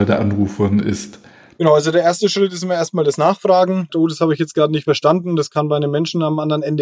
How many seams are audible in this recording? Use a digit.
2